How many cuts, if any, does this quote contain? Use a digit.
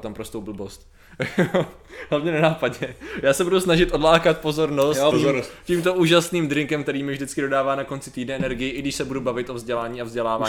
1